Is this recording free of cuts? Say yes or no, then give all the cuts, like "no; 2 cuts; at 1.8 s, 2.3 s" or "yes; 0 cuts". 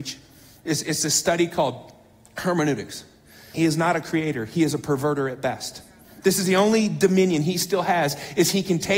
no; 1 cut; at 3.5 s